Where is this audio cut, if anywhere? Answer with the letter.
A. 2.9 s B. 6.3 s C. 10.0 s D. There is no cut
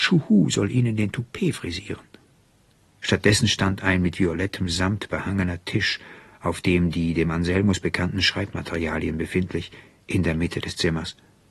A